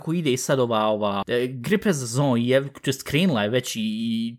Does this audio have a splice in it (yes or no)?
yes